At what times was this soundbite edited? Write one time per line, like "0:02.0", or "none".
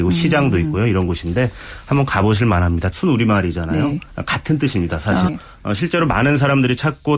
0:02.9
0:05.3

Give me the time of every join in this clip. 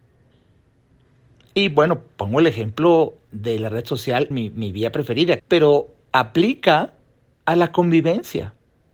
0:04.3
0:05.4

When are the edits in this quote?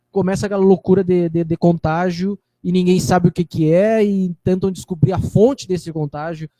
none

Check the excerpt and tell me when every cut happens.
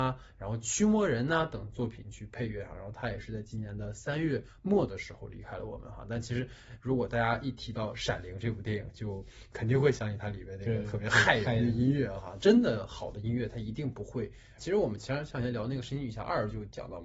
0:12.4
0:14.6

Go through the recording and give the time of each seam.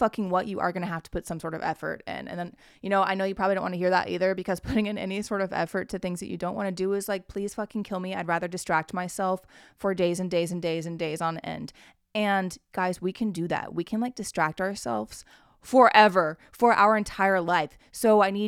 none

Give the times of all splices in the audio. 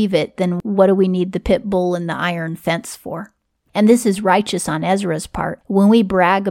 0:03.7

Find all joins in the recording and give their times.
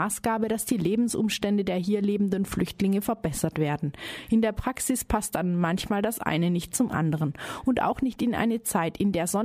none

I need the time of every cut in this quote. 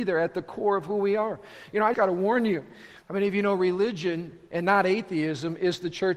0:01.9
0:03.0

